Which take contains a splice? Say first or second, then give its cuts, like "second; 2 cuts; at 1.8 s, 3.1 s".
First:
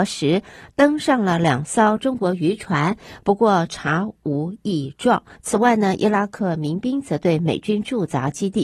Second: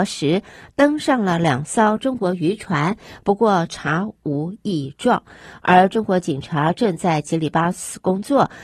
first; 1 cut; at 5.4 s